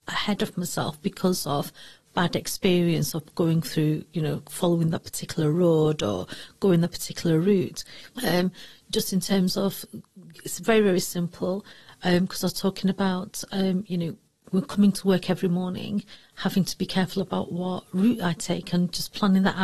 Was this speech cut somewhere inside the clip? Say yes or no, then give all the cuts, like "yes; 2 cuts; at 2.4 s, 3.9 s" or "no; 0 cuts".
yes; 1 cut; at 8.1 s